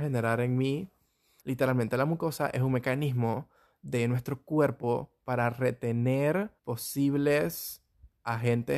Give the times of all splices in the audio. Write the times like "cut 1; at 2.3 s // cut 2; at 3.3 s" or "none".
cut 1; at 1.4 s // cut 2; at 6.6 s